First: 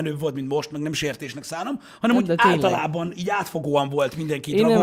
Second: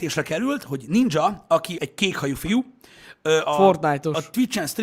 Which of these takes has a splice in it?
second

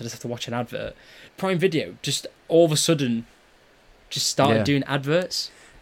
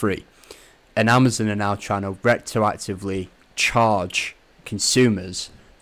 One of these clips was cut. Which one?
first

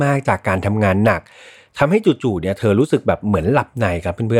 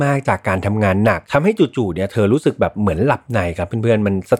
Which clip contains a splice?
second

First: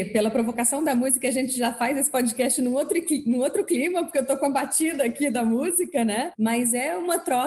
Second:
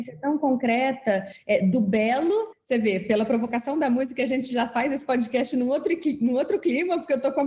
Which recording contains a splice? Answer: first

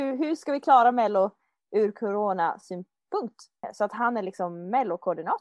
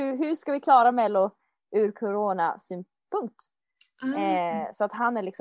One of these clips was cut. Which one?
first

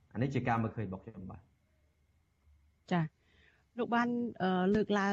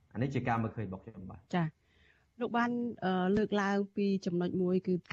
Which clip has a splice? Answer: second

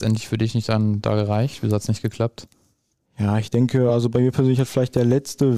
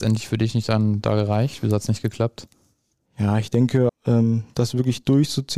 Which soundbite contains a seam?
second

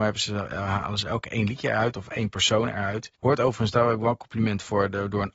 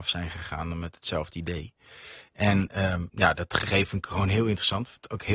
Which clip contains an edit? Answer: first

